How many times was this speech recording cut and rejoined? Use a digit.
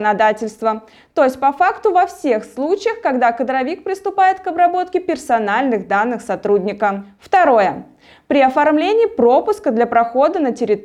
0